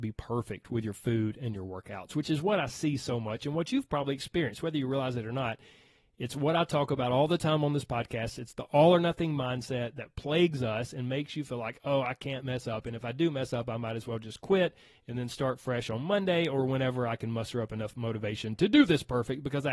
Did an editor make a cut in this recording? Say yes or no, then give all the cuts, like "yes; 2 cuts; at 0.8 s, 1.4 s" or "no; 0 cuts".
no; 0 cuts